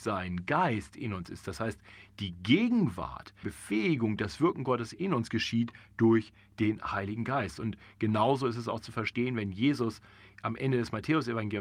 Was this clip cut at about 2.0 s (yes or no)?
no